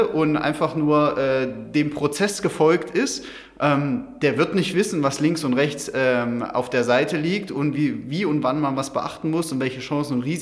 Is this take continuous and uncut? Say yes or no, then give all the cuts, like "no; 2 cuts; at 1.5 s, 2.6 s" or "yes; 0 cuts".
yes; 0 cuts